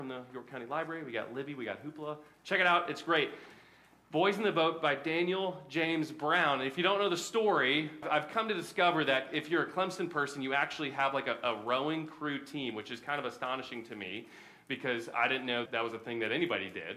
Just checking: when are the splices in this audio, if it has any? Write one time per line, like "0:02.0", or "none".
0:08.0
0:15.7

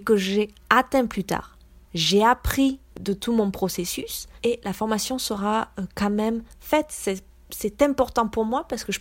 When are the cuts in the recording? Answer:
0:01.8
0:04.4

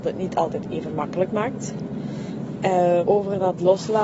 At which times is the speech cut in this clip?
0:03.0

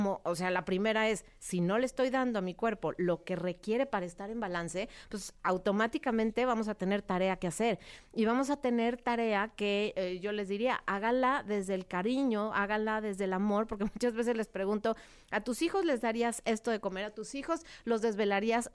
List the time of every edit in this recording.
none

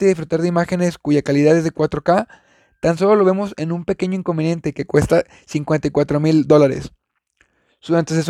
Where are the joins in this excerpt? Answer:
none

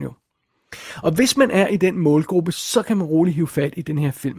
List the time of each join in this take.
none

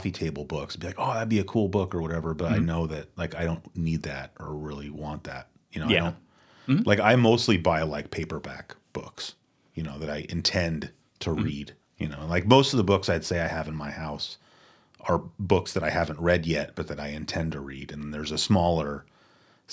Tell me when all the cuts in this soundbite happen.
none

